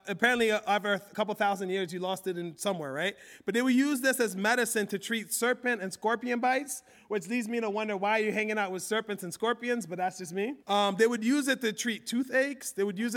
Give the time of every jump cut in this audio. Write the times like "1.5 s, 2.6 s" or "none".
10.6 s